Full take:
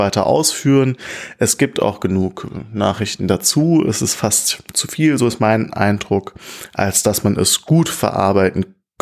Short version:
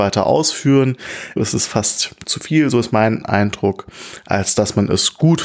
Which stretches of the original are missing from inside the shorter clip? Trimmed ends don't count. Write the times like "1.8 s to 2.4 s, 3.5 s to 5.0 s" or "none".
1.4 s to 3.8 s